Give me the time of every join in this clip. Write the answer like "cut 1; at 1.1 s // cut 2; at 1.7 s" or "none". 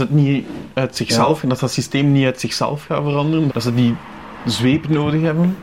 cut 1; at 3.5 s